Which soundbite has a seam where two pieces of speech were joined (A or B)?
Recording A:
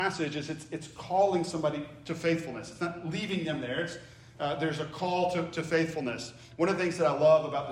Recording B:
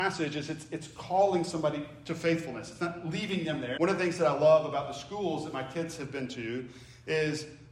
B